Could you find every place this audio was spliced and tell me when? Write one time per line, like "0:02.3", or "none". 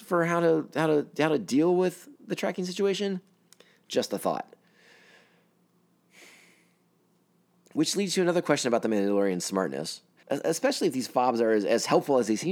0:10.2